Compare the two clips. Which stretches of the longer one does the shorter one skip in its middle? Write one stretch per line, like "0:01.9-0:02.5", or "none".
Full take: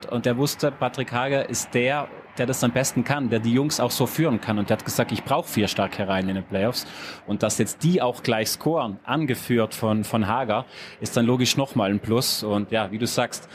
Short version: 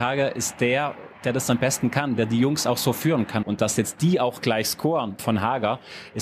0:04.6-0:07.2
0:09.0-0:10.0